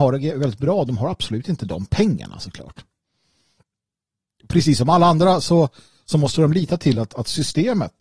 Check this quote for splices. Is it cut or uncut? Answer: uncut